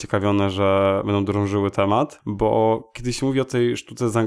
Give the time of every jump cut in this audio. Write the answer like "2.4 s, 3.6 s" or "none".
none